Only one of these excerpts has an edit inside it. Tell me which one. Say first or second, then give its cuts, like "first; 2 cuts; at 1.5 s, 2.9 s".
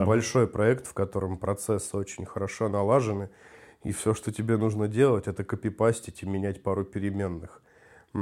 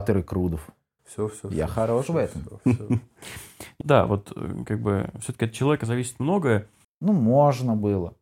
second; 2 cuts; at 3.8 s, 6.8 s